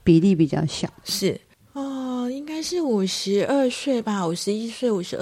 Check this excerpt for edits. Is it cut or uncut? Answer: uncut